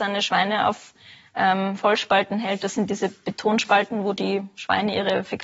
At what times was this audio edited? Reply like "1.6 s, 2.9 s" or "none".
none